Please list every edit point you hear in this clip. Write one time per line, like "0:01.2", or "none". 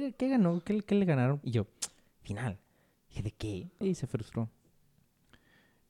0:01.4
0:03.8